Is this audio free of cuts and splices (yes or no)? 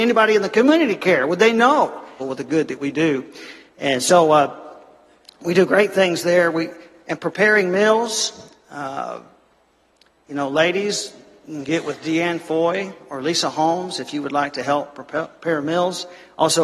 no